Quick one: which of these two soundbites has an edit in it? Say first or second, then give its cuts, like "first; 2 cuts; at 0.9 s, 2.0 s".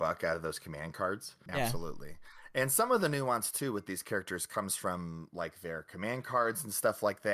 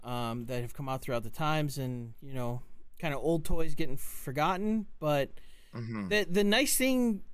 first; 1 cut; at 1.5 s